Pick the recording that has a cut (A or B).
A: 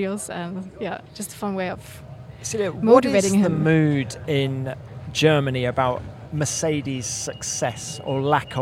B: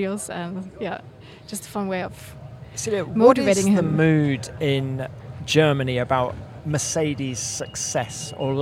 A